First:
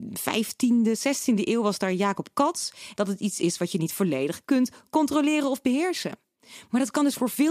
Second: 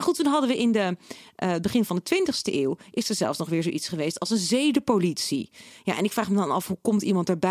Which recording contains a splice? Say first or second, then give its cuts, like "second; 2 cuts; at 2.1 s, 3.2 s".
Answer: first; 1 cut; at 2.9 s